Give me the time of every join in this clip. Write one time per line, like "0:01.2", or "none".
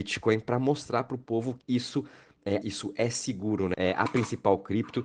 0:01.6
0:02.6
0:03.7